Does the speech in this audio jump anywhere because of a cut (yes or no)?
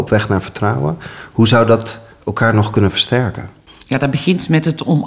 no